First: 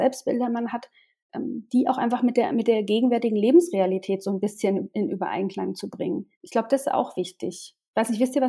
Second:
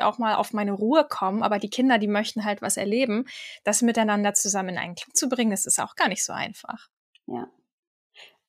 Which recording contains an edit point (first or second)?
first